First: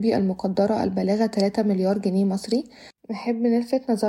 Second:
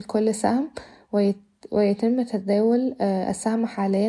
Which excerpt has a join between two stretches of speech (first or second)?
first